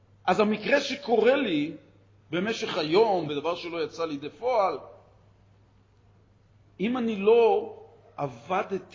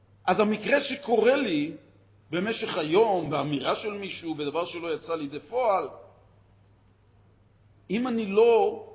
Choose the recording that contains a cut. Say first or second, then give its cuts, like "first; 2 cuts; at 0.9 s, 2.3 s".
first; 1 cut; at 3.3 s